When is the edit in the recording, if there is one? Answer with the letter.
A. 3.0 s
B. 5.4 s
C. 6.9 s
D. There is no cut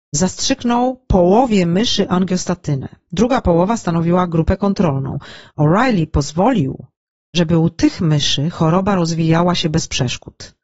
D